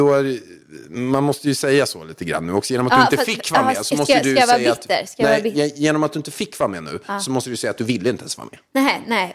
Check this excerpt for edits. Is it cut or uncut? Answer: uncut